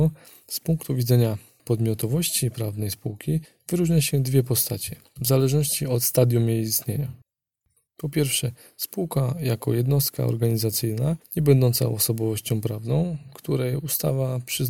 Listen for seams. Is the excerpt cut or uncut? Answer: uncut